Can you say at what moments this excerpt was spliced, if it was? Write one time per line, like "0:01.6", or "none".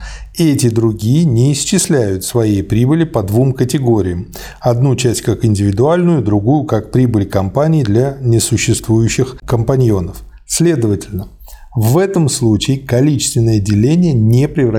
none